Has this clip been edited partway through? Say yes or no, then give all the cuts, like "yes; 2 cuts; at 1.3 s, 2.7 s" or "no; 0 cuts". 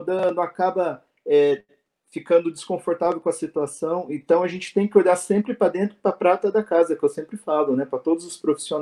no; 0 cuts